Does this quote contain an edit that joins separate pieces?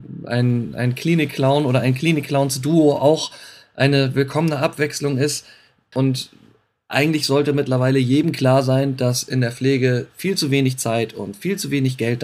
yes; 1 cut; at 5.9 s

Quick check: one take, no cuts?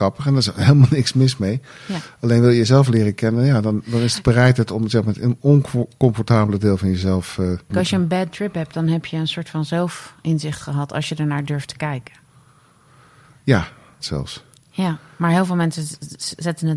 no; 2 cuts; at 7.7 s, 14.0 s

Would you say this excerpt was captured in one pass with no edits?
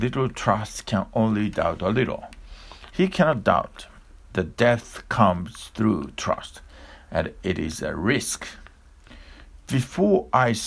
no; 1 cut; at 2.9 s

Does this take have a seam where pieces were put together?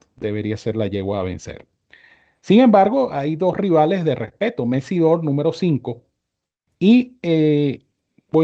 yes; 1 cut; at 6.7 s

